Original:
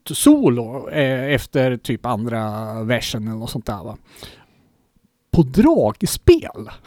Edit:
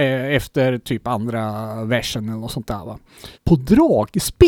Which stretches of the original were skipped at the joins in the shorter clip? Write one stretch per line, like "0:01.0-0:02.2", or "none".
0:04.3-0:05.2